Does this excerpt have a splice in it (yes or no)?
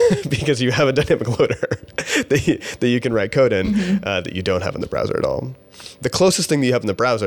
no